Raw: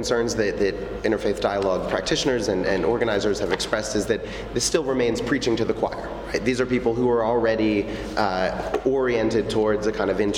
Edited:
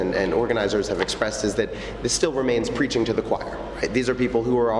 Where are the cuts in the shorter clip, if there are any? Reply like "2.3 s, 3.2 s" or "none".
none